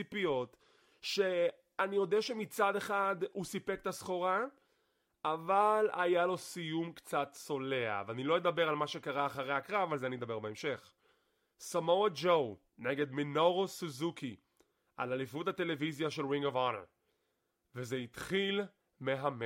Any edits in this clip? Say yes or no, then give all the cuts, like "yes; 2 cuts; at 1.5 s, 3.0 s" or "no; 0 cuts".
yes; 1 cut; at 12.7 s